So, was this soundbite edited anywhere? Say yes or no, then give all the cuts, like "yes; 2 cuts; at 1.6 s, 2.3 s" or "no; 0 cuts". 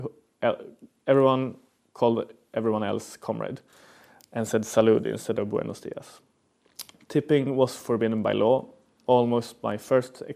no; 0 cuts